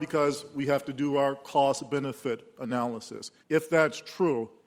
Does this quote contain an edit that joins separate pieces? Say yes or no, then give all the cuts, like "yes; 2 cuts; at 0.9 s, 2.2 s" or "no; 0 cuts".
yes; 1 cut; at 3.4 s